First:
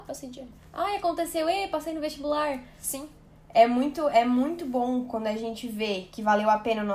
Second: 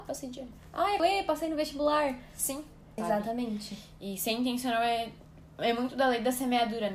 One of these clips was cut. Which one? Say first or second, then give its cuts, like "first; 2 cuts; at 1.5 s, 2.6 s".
second; 2 cuts; at 1.0 s, 3.0 s